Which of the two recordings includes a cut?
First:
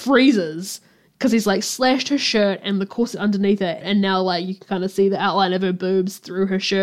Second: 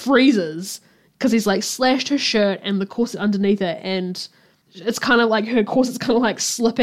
first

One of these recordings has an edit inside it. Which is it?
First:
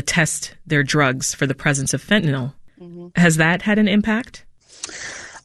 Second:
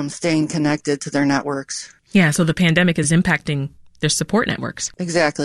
first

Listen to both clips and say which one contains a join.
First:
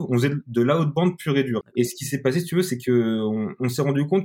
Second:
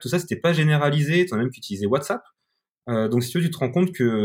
first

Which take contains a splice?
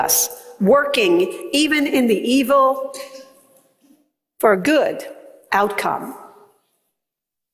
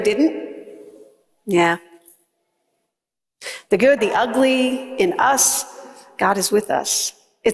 second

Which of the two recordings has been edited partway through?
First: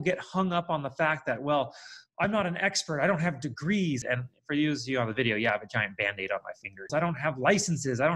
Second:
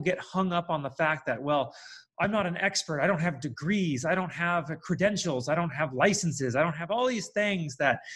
first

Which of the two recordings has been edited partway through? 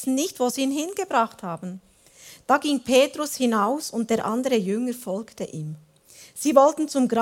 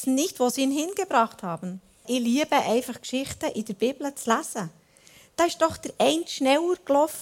second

